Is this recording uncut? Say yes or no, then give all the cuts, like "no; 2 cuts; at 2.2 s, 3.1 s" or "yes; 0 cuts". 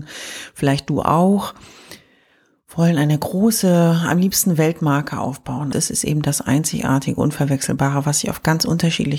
no; 1 cut; at 5.7 s